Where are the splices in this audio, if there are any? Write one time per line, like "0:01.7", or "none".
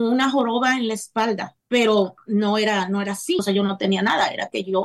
0:01.6
0:03.4